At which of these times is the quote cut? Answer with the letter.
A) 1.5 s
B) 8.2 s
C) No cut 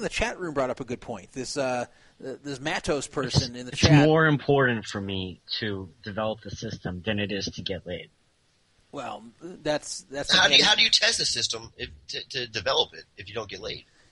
C